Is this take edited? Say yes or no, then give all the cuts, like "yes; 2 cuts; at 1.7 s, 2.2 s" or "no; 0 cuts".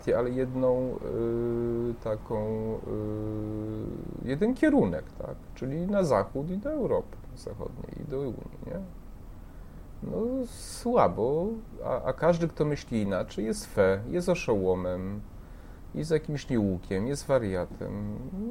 no; 0 cuts